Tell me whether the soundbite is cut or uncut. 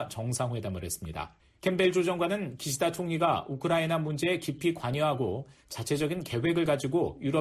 cut